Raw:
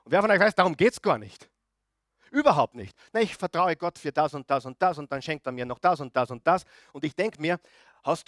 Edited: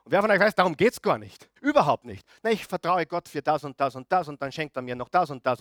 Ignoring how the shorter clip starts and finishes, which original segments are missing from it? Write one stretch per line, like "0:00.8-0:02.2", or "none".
0:01.6-0:02.3